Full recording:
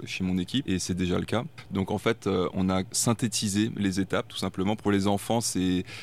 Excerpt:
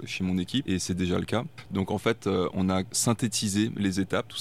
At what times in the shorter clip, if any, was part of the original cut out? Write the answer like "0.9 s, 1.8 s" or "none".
none